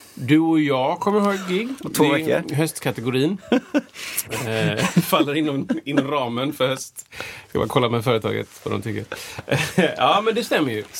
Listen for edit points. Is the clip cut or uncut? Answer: uncut